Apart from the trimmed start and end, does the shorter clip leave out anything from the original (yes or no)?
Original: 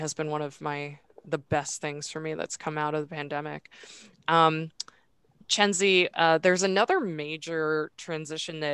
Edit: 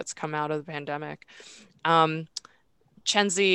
no